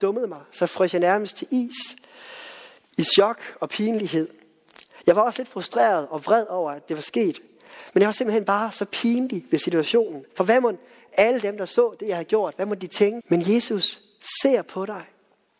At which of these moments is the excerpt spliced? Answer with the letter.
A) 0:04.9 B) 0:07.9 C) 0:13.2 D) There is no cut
C